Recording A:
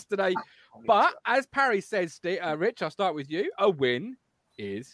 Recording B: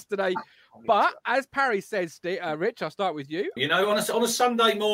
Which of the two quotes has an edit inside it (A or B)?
B